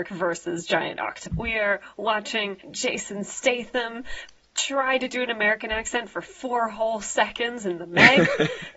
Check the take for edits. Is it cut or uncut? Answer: cut